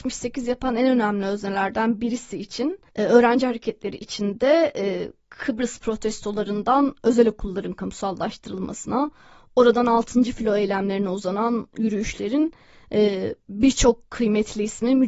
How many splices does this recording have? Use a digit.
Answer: 1